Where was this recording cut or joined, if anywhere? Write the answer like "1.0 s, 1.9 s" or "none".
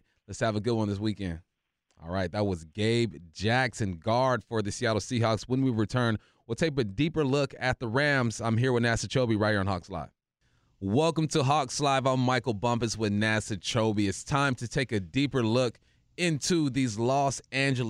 1.9 s